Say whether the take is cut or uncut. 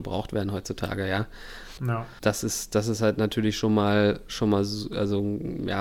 cut